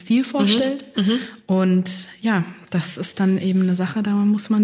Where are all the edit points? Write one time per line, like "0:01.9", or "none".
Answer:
none

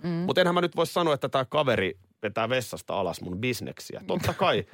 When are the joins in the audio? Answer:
none

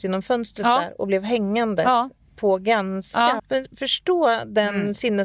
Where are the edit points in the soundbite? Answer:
0:03.4

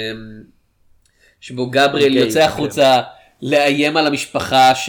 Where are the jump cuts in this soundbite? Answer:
none

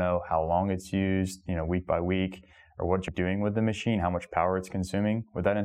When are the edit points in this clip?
0:03.1

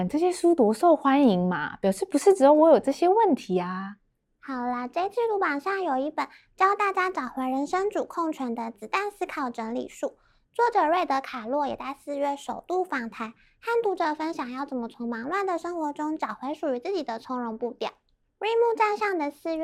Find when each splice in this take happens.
none

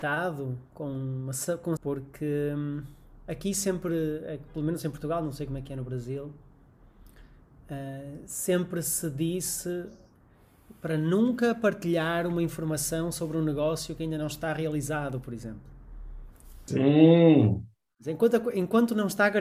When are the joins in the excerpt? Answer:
0:01.8
0:16.7

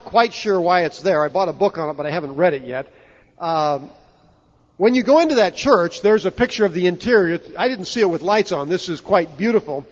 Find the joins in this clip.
0:03.2

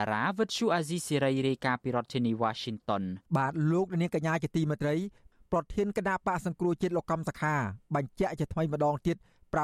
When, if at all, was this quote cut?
0:03.3

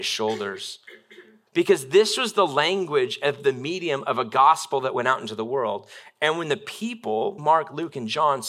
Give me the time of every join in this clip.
0:01.5
0:07.4

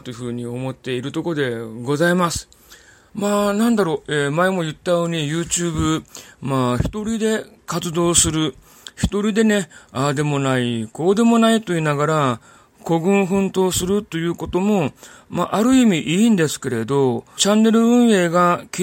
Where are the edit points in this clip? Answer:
0:03.1
0:17.4

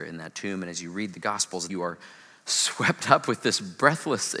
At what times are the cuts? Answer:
0:01.7

